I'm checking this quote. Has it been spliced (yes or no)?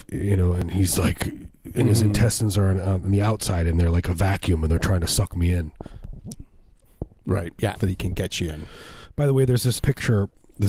yes